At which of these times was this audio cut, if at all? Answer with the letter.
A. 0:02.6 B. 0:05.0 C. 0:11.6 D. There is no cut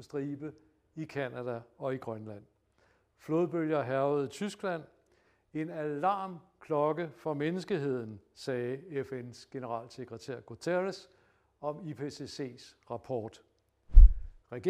D